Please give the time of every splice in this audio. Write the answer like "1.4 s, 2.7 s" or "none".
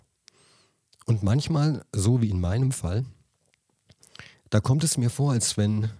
none